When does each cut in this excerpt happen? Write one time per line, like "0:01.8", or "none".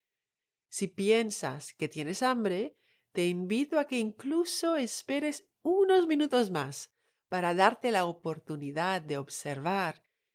none